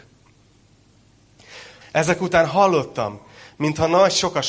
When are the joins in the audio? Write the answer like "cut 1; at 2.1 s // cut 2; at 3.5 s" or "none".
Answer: cut 1; at 1.8 s